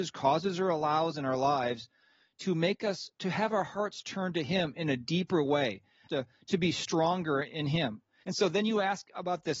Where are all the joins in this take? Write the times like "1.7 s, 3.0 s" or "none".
6.1 s, 8.2 s